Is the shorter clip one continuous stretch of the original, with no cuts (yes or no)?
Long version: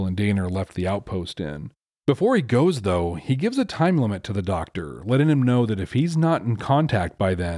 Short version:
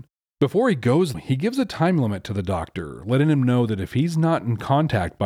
no